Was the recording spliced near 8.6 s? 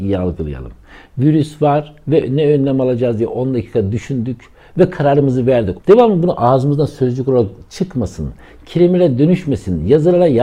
no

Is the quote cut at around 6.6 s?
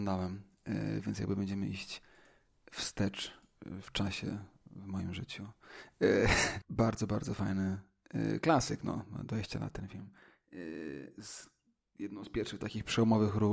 yes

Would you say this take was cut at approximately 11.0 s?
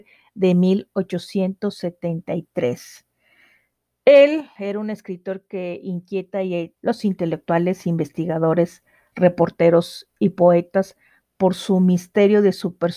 no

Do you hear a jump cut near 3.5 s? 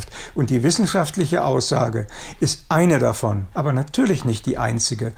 yes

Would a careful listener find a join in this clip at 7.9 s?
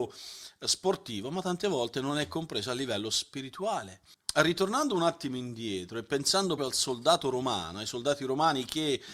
no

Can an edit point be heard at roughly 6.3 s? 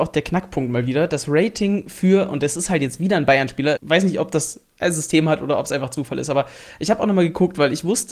no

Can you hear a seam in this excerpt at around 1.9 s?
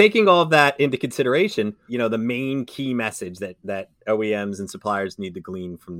yes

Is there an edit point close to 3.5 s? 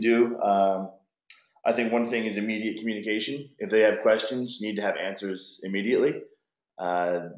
no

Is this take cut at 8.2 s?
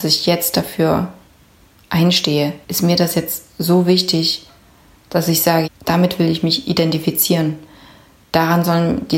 no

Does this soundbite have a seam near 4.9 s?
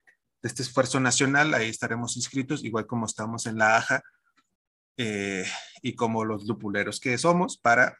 no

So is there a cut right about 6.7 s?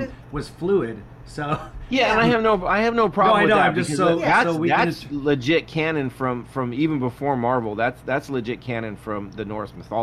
no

